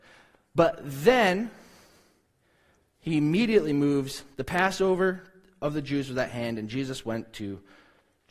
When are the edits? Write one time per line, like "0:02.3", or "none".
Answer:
none